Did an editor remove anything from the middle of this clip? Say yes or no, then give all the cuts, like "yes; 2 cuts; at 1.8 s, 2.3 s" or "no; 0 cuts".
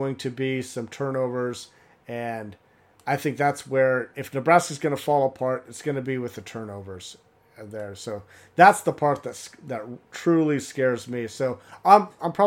no; 0 cuts